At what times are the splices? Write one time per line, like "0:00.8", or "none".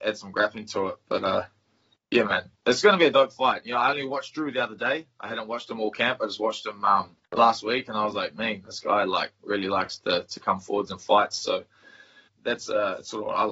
0:07.2
0:12.3

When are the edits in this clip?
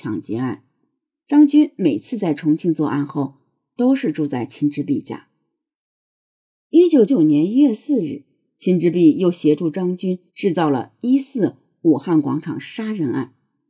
0:01.1
0:07.1
0:10.3

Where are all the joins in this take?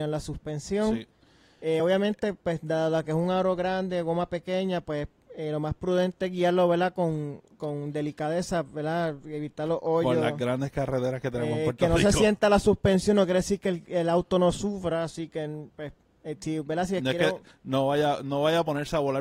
none

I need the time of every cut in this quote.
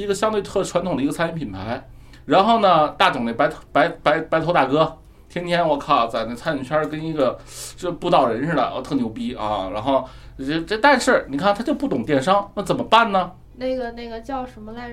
0:13.4

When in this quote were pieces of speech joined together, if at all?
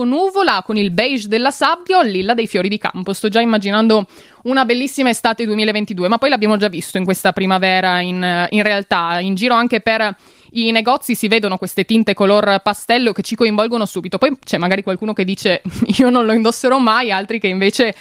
0:08.5

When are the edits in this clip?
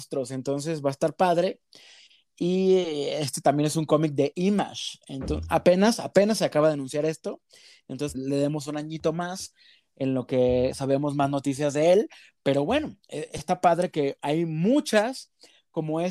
0:08.1

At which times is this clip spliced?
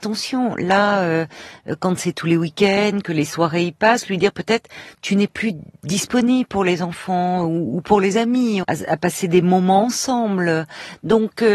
0:08.6

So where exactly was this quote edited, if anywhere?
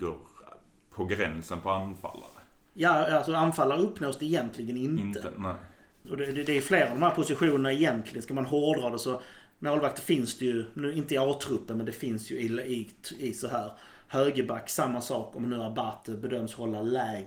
none

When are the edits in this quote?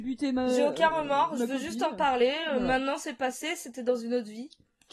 none

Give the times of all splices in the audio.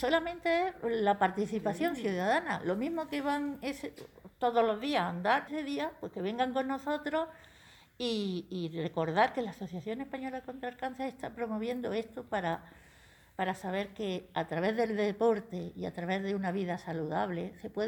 0:05.5

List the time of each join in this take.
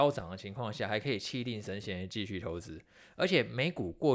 none

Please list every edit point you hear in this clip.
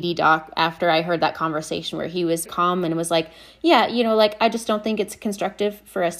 0:02.5

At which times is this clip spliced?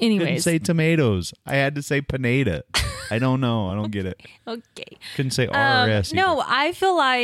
none

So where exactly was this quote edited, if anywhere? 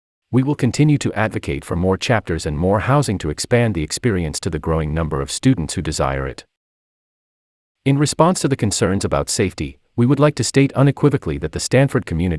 none

